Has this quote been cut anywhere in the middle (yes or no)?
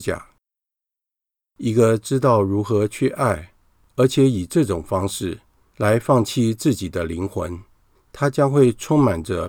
no